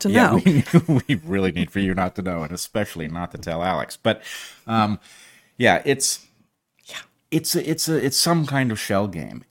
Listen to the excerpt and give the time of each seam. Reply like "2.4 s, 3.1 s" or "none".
none